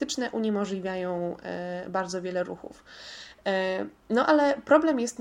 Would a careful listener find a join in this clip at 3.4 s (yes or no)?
no